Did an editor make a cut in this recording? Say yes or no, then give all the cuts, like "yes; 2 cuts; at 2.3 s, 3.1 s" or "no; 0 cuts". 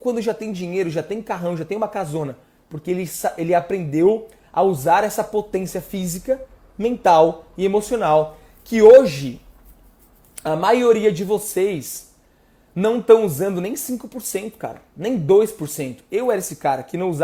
no; 0 cuts